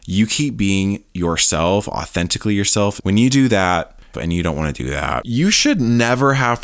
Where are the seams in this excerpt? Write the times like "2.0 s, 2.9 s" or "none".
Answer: 3.0 s, 4.1 s